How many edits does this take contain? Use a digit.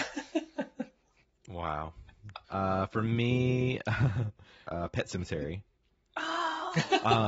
2